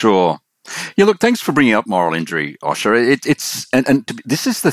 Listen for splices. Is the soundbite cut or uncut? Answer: uncut